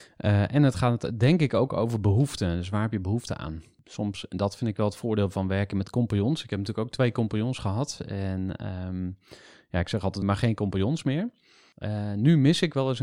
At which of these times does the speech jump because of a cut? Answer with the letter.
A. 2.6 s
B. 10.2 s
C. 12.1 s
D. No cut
B